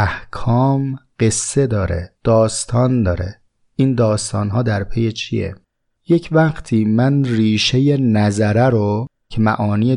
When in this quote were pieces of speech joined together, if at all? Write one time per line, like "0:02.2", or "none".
0:02.2